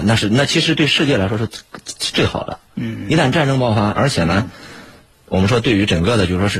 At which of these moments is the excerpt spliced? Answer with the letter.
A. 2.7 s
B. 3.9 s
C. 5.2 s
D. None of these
B